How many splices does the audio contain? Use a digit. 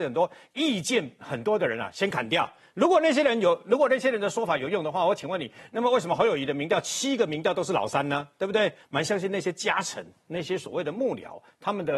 1